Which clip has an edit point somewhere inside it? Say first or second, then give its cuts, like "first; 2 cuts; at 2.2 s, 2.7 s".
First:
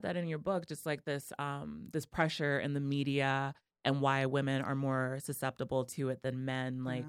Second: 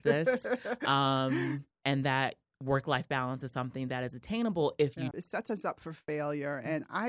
second; 2 cuts; at 1.7 s, 5.1 s